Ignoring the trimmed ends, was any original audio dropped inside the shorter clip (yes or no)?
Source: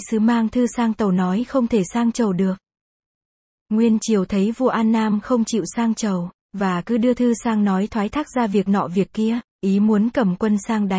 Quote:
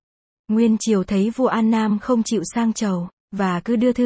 no